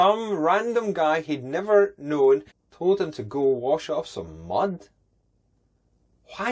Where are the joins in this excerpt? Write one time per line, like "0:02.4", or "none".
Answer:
0:02.5